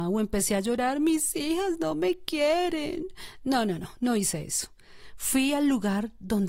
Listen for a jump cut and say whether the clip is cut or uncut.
cut